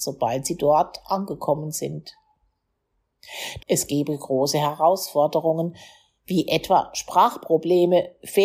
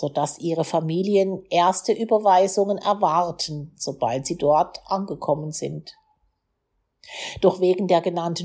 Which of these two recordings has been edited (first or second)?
first